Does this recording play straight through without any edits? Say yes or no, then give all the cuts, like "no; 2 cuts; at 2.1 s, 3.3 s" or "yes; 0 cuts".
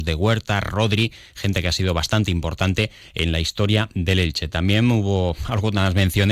yes; 0 cuts